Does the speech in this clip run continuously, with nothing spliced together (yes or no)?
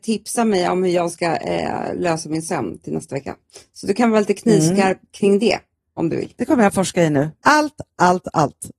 no